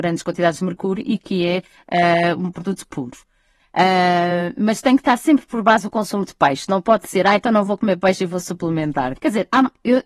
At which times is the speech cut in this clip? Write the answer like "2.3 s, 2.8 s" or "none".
3.6 s, 9.2 s